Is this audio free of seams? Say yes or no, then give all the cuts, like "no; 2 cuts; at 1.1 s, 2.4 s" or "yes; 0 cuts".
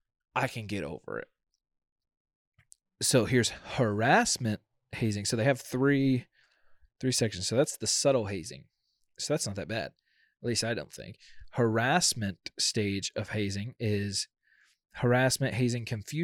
yes; 0 cuts